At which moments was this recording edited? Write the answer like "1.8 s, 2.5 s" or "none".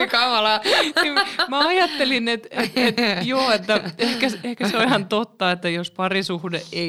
none

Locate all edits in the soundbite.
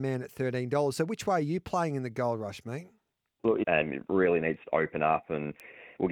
3.6 s

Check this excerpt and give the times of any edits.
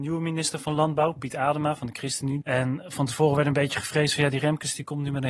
2.4 s

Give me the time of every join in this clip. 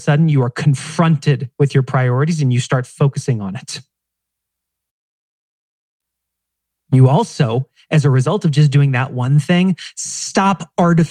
none

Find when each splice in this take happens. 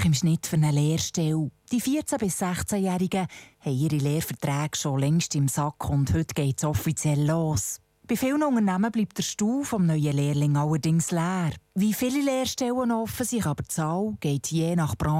13.4 s

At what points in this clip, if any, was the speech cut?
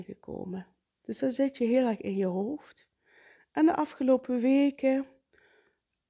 1.0 s

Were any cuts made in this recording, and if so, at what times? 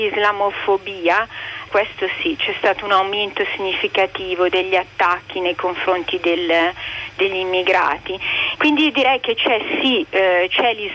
1.7 s, 8.6 s

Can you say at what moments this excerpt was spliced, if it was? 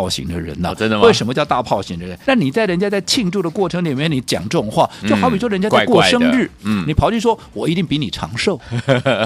2.2 s

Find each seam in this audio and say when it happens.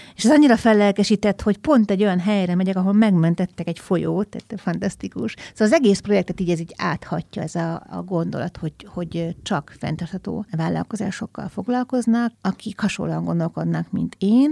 10.5 s, 12.3 s

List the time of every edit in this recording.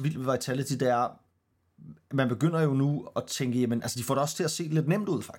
none

